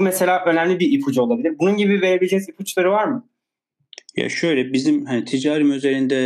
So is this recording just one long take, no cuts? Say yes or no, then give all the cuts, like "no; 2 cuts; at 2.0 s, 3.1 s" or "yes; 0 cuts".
yes; 0 cuts